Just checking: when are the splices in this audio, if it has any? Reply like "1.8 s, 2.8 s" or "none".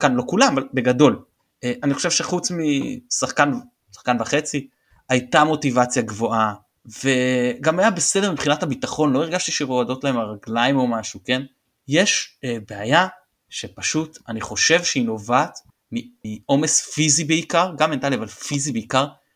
none